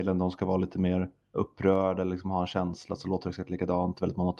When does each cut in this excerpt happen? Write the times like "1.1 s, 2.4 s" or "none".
1.3 s